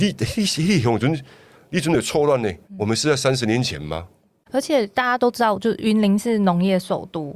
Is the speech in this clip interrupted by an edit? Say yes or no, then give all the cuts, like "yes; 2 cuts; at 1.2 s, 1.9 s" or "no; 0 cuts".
yes; 1 cut; at 2.6 s